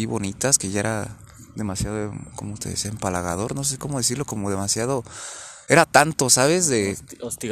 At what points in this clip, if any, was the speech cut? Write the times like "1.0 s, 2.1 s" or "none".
none